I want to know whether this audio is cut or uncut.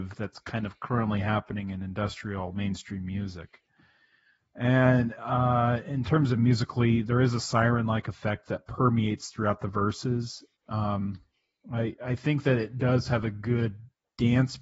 cut